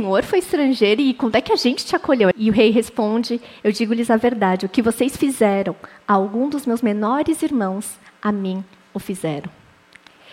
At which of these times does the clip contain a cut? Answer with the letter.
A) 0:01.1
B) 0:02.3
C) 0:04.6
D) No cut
B